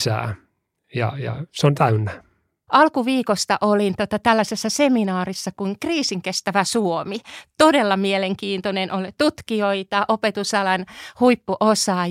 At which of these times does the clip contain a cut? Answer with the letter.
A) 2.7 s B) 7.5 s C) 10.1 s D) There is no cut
A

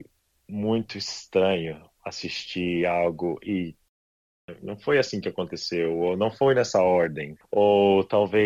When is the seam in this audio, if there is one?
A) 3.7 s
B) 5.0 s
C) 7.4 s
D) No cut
D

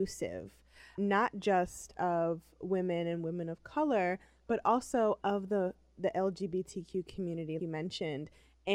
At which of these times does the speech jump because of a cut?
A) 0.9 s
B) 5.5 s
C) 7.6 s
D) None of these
C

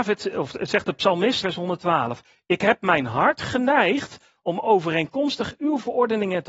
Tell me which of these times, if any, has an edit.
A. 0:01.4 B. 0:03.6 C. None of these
A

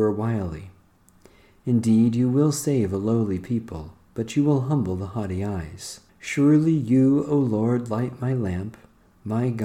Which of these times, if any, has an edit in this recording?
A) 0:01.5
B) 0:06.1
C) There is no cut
B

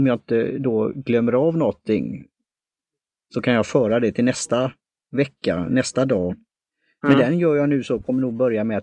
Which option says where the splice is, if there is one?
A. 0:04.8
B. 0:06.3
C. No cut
B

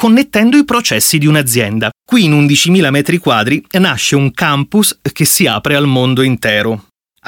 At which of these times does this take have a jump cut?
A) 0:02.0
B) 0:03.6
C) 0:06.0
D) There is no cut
A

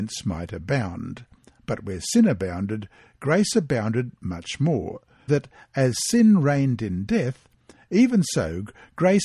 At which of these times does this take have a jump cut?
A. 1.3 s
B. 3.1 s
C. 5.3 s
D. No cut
C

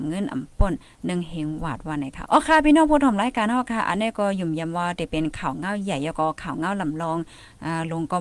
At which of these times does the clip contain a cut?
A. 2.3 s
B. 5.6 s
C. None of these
A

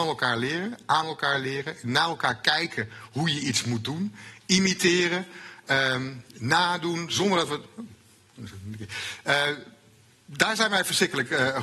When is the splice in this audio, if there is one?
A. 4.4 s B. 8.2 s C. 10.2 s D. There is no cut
D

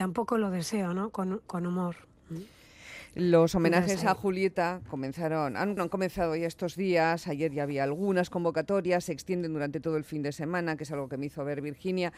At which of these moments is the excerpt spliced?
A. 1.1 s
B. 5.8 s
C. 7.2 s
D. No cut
B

